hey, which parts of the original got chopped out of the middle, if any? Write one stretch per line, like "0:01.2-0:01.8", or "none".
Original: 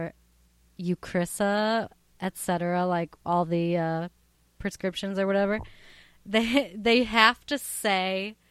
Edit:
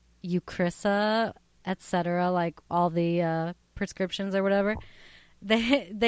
0:04.2-0:04.5